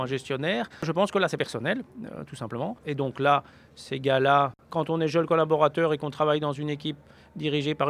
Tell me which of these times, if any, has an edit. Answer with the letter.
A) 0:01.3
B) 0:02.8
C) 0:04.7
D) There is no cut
B